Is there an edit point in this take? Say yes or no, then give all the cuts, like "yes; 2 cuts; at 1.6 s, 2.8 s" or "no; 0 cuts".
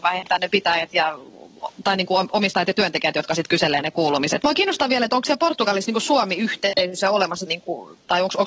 yes; 2 cuts; at 4.4 s, 7.5 s